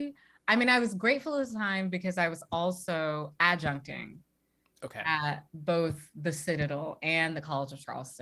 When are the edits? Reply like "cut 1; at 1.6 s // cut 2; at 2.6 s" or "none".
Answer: none

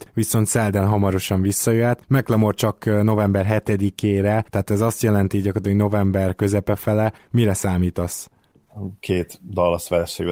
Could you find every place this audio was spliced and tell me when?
cut 1; at 7.2 s

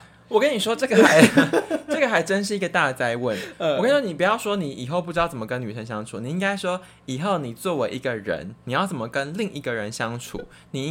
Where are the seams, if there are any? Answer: none

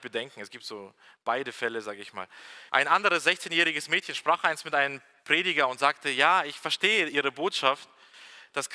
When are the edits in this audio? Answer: cut 1; at 2.7 s

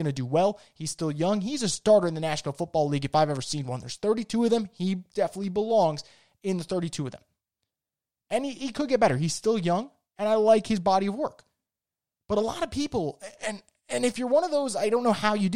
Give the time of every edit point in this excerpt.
none

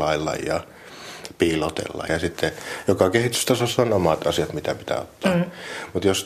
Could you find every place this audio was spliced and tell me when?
cut 1; at 2.1 s

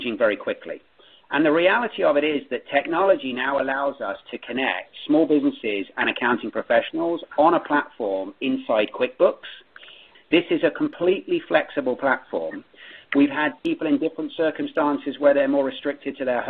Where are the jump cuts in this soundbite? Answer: cut 1; at 10.1 s // cut 2; at 13.0 s

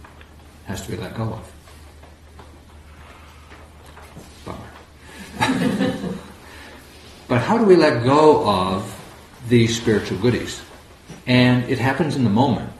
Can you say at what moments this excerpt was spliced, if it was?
cut 1; at 11.2 s

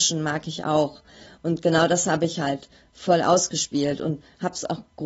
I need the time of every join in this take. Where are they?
none

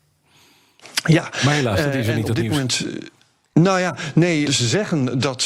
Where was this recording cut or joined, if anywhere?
cut 1; at 4.5 s

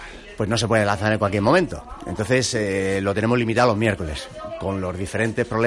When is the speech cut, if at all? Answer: none

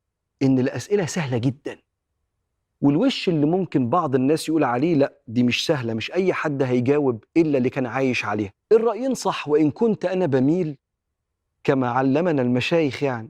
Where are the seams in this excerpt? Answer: cut 1; at 7.3 s // cut 2; at 8.6 s

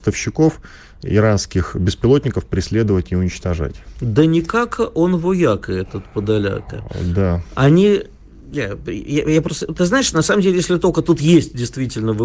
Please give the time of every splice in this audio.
none

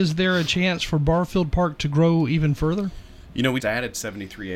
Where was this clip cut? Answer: cut 1; at 3.6 s

